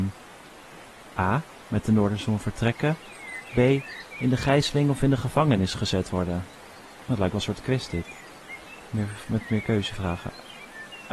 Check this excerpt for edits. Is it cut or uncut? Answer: uncut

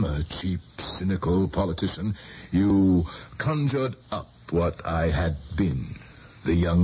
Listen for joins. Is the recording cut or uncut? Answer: uncut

